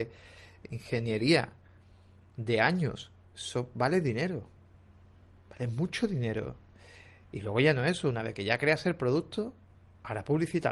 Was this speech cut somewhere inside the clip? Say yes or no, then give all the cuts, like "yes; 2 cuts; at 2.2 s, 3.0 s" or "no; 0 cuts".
no; 0 cuts